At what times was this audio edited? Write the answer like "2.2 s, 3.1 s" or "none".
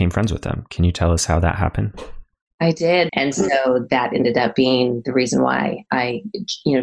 3.1 s